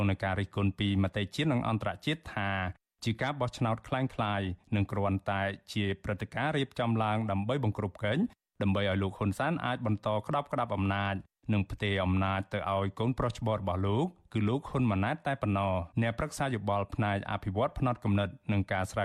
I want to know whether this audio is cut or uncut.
cut